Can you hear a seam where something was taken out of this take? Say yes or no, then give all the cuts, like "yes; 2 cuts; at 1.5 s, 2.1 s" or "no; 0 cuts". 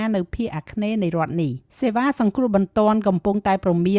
yes; 1 cut; at 1.7 s